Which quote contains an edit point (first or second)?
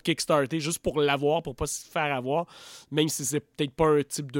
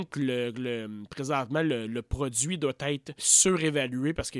second